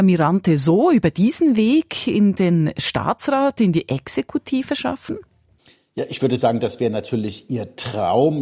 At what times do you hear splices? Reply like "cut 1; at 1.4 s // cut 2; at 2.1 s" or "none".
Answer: none